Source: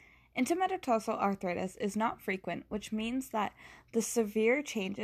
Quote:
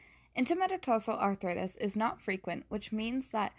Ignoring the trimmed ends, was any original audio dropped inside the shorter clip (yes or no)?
no